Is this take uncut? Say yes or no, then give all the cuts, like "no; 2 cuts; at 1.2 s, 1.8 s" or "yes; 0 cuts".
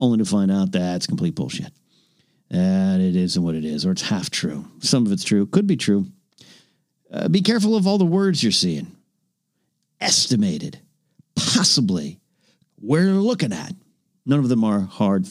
no; 1 cut; at 12.7 s